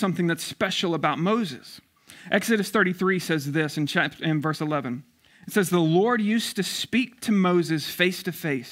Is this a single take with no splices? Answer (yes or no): yes